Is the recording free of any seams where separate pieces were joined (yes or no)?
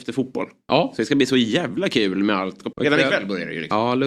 no